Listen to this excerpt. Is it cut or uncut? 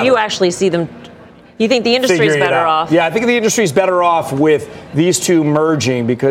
uncut